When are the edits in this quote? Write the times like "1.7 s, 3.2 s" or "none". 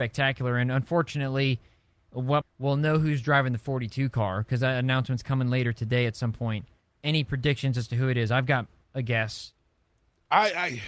2.4 s